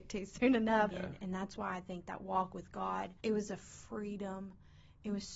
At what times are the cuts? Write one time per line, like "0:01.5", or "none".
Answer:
0:00.9
0:03.2